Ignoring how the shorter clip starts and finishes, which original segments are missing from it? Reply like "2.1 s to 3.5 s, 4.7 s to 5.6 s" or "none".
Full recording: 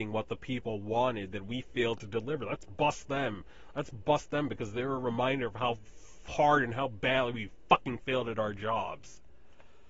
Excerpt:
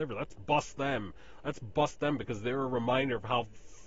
none